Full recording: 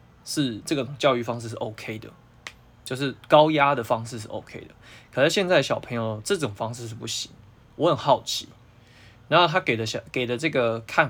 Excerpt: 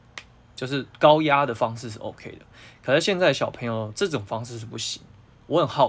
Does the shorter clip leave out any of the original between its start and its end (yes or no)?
no